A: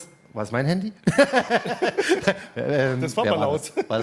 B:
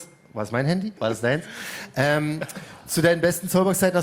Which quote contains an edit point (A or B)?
B